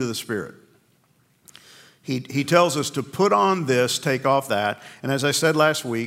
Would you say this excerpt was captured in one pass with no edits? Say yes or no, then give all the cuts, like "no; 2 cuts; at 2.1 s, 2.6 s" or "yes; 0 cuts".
yes; 0 cuts